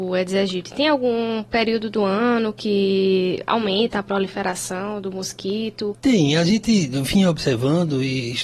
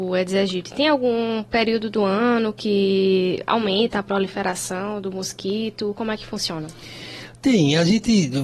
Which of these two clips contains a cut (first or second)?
first